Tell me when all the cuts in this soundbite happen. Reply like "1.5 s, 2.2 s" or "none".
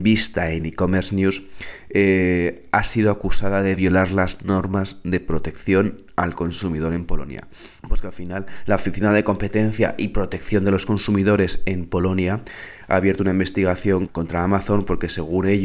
7.8 s, 14.1 s